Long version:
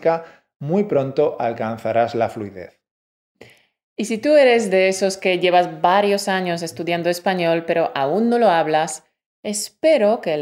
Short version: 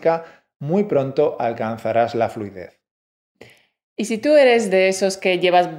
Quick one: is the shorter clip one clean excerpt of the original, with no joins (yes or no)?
yes